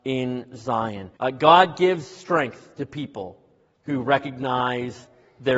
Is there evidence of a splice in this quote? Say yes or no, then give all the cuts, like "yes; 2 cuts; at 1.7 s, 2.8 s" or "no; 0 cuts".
yes; 1 cut; at 1.2 s